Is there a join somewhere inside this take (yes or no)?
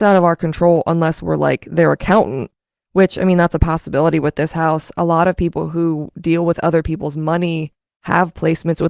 no